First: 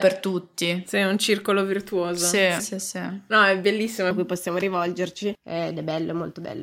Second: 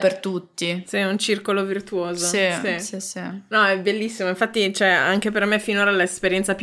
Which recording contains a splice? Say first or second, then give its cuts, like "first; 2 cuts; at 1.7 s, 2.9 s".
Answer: first; 2 cuts; at 2.6 s, 4.1 s